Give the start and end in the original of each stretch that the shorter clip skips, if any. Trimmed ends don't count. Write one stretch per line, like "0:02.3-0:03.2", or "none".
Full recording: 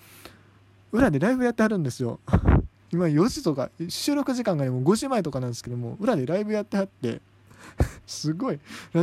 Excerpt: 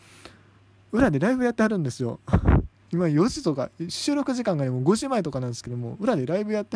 none